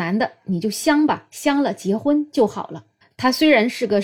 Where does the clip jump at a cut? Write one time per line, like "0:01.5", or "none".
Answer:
0:03.0